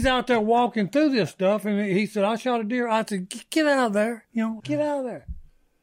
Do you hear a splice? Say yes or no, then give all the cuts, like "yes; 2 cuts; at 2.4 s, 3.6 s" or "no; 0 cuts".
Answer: yes; 1 cut; at 4.6 s